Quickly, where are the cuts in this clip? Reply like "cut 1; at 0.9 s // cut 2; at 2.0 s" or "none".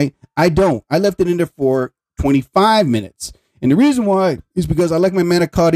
none